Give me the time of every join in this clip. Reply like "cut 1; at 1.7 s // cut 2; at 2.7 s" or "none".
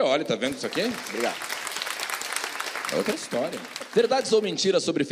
none